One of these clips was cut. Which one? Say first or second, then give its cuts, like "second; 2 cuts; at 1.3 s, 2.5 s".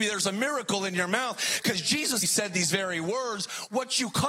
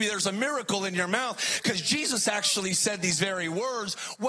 first; 1 cut; at 2.2 s